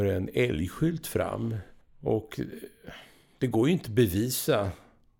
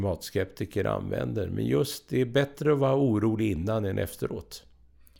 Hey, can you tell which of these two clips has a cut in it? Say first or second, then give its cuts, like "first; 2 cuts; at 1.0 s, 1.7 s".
first; 1 cut; at 1.8 s